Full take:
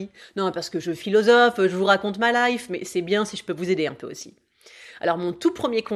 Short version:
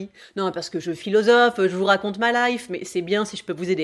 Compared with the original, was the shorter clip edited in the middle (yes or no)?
no